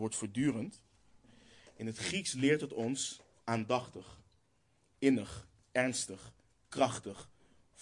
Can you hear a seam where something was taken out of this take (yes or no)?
no